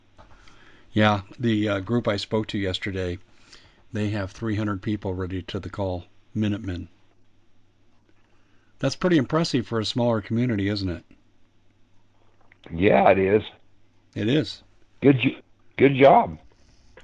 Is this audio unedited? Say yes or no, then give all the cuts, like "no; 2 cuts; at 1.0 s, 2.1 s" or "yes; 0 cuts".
yes; 0 cuts